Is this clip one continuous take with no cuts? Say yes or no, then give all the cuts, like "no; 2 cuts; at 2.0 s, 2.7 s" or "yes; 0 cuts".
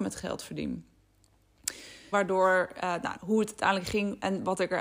no; 2 cuts; at 2.1 s, 3.2 s